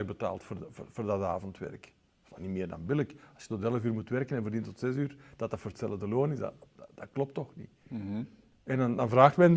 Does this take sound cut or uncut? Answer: uncut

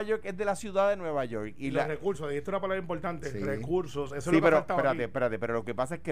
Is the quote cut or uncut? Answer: uncut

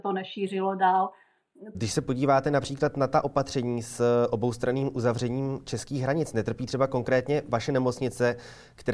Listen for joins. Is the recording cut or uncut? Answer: cut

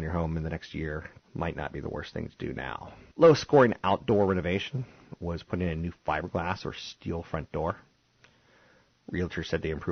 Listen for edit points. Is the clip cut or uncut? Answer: cut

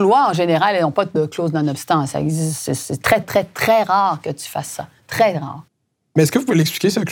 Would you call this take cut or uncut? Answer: cut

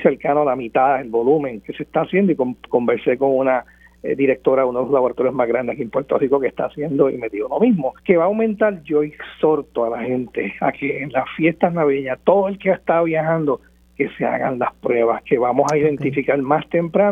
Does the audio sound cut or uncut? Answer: cut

